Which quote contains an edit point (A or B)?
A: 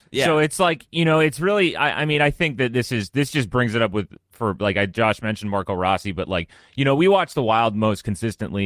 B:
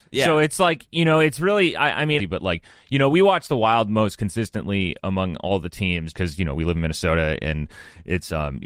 B